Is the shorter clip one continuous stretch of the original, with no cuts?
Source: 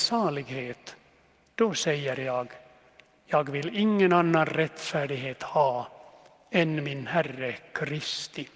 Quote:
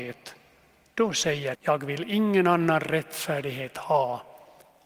no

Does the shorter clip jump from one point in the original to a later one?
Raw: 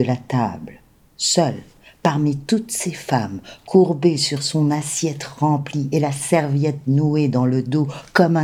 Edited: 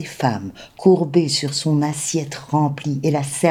no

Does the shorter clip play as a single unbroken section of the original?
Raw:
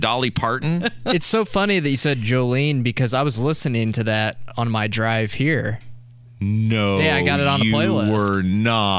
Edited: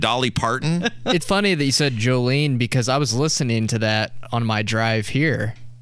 no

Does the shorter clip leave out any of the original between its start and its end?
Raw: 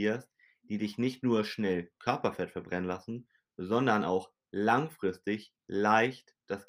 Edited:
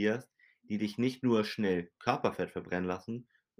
no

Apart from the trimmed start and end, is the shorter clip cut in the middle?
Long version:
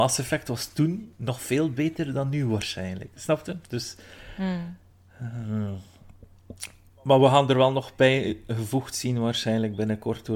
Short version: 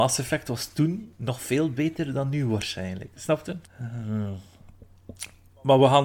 yes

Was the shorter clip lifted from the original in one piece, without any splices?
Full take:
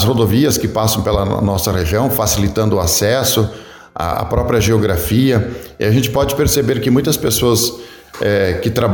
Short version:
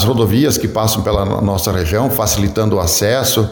yes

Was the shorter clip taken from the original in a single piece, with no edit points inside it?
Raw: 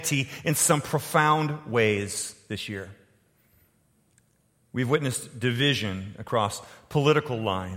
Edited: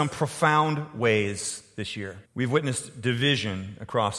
no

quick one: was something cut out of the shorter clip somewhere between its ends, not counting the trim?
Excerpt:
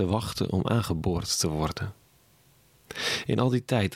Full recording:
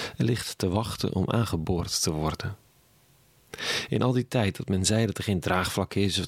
no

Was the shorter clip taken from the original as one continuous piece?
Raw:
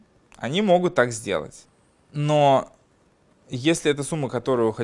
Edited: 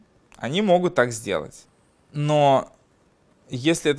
yes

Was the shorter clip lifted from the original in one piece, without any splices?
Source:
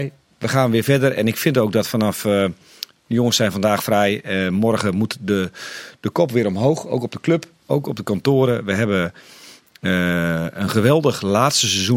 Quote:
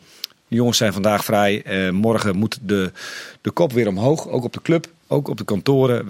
yes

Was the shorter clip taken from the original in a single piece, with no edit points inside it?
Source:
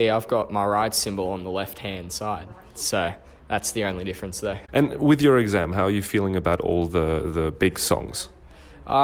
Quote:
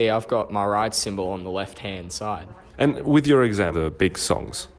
no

